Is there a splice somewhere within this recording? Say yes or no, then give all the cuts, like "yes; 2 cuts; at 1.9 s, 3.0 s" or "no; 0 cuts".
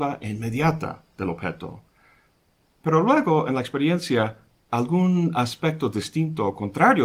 no; 0 cuts